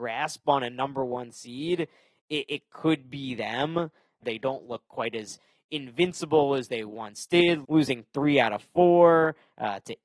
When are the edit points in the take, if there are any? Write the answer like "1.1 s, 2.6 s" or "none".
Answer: 4.2 s, 7.6 s